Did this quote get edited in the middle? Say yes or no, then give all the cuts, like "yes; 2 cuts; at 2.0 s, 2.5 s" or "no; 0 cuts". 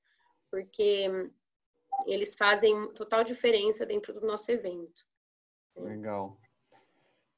yes; 1 cut; at 2.9 s